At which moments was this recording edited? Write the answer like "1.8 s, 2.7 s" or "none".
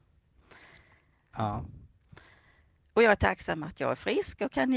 1.3 s